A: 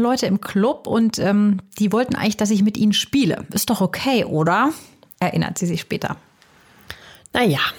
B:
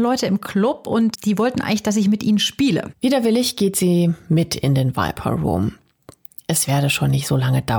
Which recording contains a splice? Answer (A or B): B